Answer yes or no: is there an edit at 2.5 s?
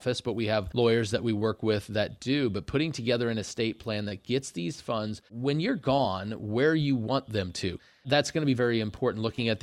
no